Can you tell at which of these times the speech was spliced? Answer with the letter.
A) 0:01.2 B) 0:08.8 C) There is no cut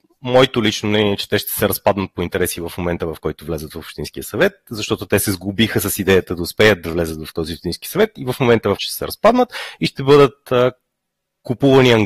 B